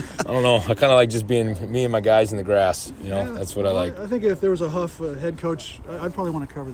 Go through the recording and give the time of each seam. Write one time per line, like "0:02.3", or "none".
none